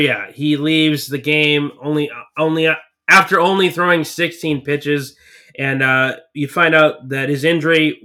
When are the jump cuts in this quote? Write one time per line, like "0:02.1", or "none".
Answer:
none